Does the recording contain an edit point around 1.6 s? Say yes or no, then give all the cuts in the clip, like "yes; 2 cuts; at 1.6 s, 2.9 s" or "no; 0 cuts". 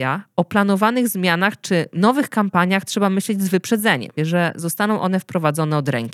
no; 1 cut; at 4.2 s